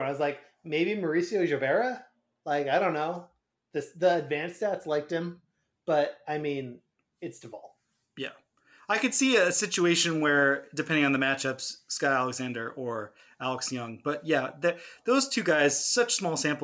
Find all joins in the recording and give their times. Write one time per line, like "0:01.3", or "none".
none